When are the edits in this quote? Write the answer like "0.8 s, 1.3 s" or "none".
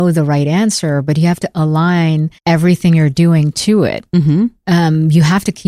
2.4 s